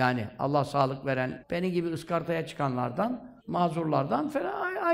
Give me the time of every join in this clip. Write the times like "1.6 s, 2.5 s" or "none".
1.4 s, 3.4 s

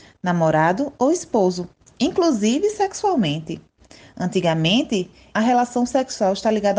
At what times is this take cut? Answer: 5.3 s

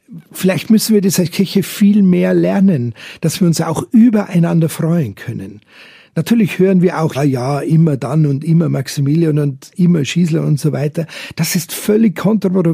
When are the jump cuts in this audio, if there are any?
7.1 s

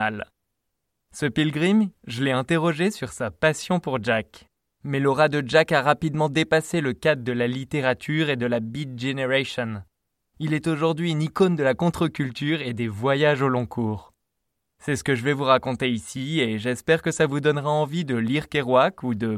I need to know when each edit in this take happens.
1.9 s, 4.7 s, 14.6 s

